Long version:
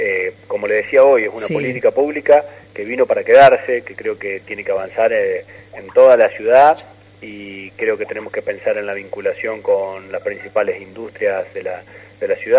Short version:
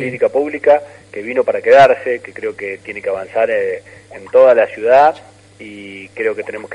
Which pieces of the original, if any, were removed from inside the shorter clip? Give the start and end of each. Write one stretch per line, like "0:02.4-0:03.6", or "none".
none